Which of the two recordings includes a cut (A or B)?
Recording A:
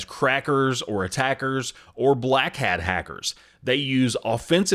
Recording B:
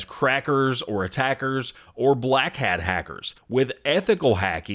B